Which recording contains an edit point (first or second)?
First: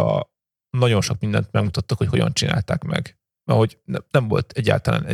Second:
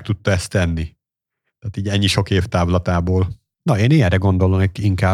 second